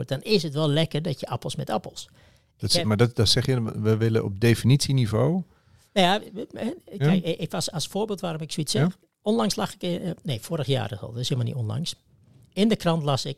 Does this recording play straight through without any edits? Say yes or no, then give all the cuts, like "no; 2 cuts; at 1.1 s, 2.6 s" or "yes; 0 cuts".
yes; 0 cuts